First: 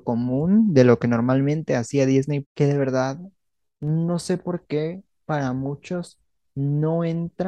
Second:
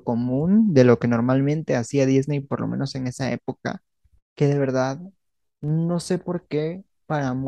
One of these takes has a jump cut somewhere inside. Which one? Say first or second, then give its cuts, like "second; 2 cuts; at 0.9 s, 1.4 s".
first; 1 cut; at 2.4 s